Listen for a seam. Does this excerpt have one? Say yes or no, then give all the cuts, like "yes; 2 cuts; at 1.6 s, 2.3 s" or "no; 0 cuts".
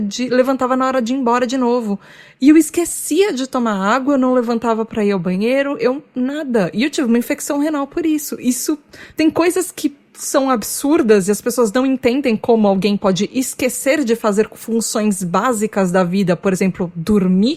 no; 0 cuts